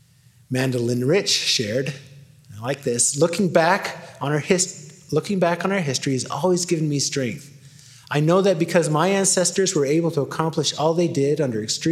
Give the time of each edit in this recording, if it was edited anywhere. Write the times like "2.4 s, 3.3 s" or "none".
none